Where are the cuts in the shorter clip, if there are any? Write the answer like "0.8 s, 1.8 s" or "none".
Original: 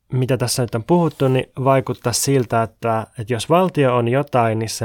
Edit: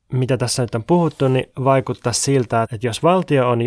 2.6 s